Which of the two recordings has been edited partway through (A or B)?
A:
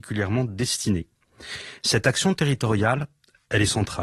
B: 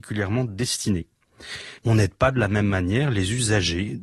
B